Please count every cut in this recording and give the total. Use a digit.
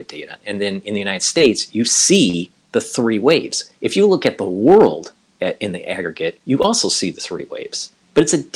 0